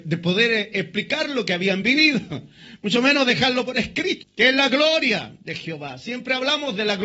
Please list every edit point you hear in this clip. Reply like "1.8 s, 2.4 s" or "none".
4.2 s